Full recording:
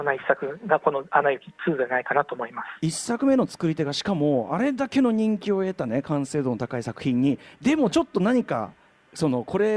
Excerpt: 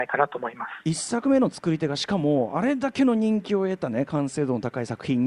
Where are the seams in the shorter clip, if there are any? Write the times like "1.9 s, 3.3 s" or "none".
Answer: none